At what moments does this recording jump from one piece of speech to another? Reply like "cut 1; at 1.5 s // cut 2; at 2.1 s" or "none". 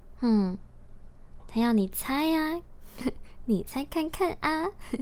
cut 1; at 1.4 s // cut 2; at 3.0 s